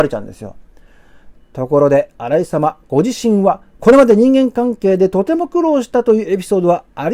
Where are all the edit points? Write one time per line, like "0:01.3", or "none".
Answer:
0:01.3
0:03.7